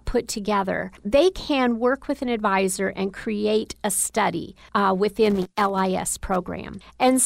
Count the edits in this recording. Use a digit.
0